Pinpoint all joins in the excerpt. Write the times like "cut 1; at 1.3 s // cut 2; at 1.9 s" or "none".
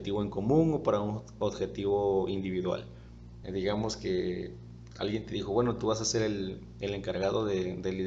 cut 1; at 3.4 s